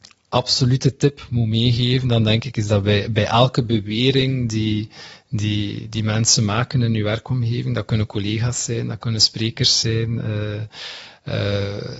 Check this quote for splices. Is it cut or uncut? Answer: uncut